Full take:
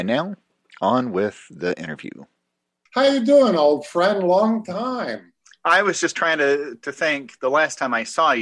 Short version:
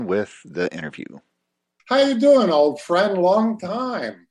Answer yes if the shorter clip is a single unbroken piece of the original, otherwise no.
yes